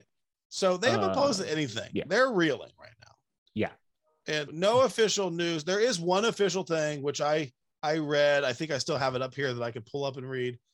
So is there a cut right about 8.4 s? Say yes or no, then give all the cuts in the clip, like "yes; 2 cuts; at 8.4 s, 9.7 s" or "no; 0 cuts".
no; 1 cut; at 4.5 s